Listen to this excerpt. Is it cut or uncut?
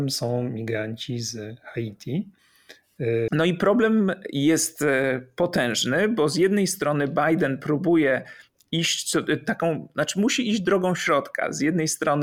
cut